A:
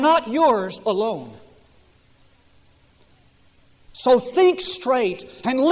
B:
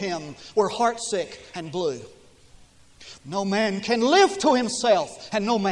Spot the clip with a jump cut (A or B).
B